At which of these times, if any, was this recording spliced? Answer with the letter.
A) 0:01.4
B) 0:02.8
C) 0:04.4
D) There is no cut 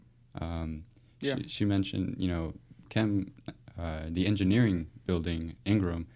B